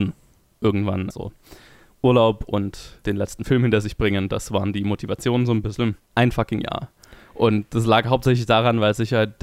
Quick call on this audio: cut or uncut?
cut